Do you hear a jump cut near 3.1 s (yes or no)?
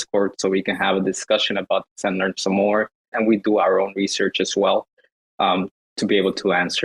yes